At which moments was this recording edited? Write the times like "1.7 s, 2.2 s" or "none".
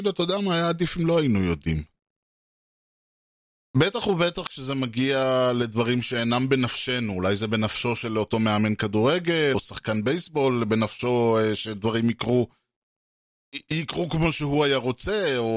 9.5 s